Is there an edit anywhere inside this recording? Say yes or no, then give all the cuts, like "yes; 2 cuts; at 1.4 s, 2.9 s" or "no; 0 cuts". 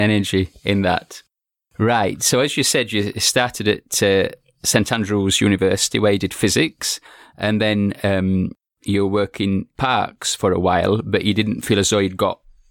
no; 0 cuts